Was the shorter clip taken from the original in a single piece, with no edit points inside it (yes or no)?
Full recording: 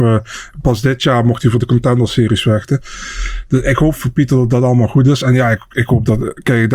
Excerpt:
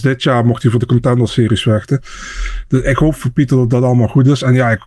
yes